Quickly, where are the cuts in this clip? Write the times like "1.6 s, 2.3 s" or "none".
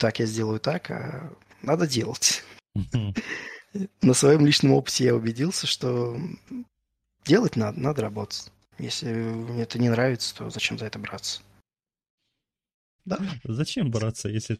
8.7 s, 13.0 s